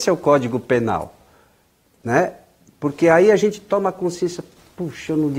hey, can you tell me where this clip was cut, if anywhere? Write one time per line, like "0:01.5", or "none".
none

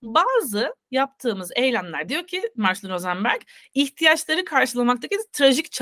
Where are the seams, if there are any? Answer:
0:02.1

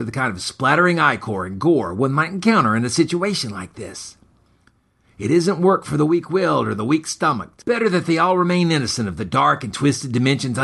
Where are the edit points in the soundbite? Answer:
none

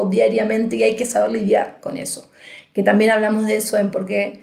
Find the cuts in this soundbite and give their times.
none

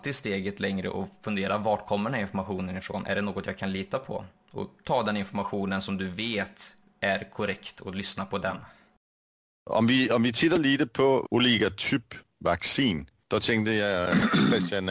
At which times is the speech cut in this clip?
none

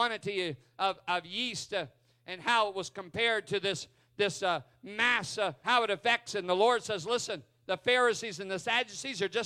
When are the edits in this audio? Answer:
0:05.6

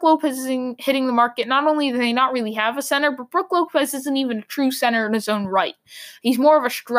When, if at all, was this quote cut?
none

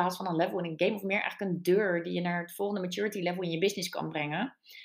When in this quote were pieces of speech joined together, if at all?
none

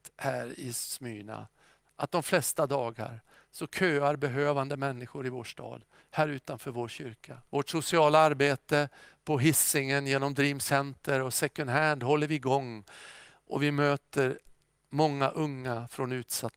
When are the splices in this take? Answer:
0:07.4

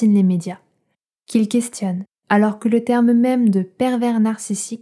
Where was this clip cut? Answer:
none

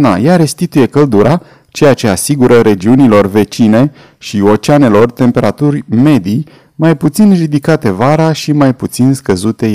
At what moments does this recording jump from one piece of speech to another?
none

